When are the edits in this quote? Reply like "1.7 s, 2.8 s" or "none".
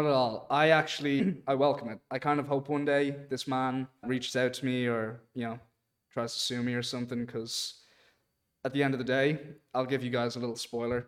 1.2 s, 4.0 s